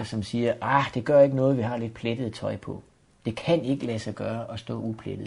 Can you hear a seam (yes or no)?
no